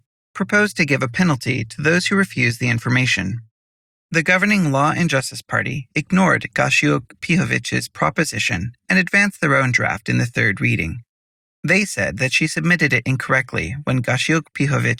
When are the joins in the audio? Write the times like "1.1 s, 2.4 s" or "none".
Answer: none